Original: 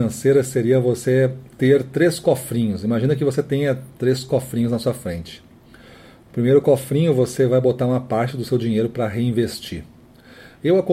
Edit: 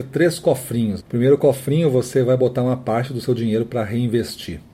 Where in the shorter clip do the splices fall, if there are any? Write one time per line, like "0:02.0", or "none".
0:01.0

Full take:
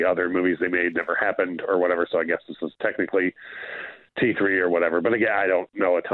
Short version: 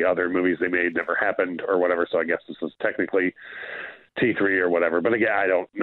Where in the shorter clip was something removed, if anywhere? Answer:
none

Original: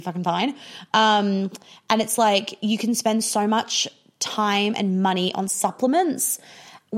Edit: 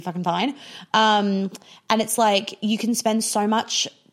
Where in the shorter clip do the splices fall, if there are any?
none

